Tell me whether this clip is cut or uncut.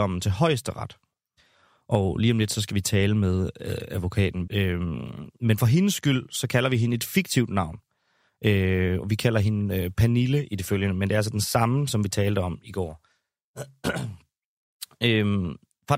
cut